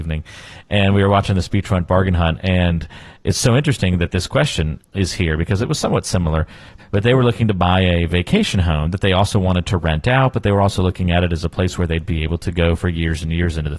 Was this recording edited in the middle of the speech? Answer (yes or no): yes